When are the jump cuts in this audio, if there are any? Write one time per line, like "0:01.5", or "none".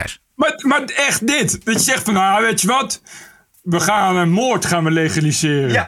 none